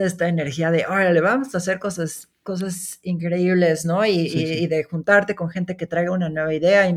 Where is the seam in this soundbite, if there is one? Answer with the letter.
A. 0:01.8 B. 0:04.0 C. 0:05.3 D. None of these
D